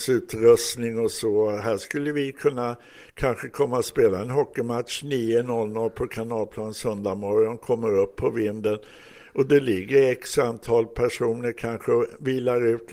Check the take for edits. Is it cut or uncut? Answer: uncut